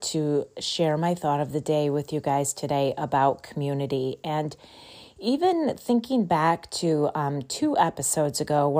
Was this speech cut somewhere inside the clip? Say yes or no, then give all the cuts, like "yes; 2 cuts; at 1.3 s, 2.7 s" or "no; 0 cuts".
no; 0 cuts